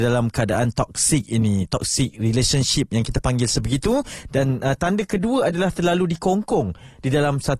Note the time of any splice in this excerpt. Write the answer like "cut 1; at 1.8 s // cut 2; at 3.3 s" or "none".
cut 1; at 4.3 s